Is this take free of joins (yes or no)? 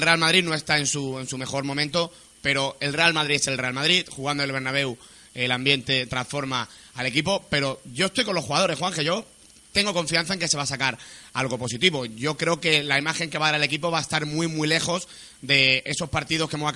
yes